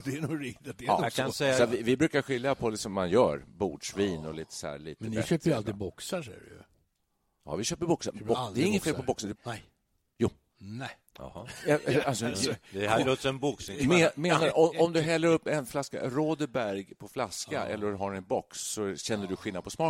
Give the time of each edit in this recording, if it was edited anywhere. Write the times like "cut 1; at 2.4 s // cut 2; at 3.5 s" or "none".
cut 1; at 9.3 s // cut 2; at 11.1 s